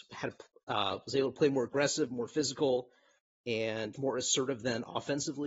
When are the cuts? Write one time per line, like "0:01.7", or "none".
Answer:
0:03.9